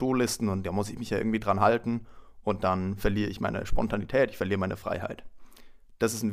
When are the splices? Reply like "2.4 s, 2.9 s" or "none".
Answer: none